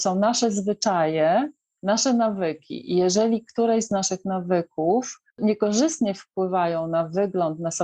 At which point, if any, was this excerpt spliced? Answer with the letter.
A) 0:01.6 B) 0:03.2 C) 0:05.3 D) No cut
C